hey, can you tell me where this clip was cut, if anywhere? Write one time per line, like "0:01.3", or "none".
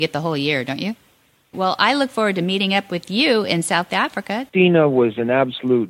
0:01.5
0:04.5